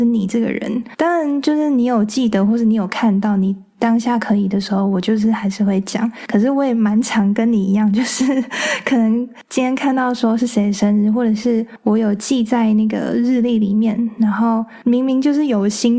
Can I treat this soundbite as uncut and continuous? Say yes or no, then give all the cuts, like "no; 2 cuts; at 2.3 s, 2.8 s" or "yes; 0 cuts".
yes; 0 cuts